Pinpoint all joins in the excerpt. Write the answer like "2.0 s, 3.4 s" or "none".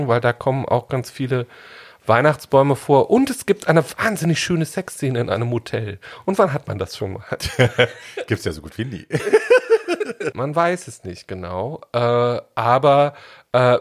10.3 s